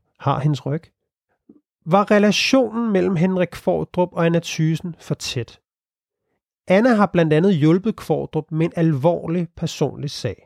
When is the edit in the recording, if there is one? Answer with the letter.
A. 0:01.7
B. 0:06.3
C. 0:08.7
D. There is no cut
D